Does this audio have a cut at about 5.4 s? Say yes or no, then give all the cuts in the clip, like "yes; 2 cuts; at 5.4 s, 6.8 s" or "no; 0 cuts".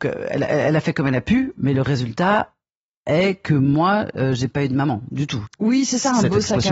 yes; 1 cut; at 5.4 s